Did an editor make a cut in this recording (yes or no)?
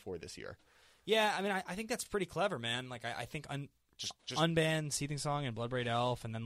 no